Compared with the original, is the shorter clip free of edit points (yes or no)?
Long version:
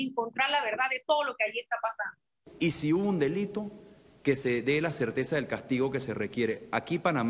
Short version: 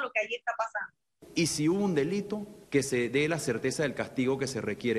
no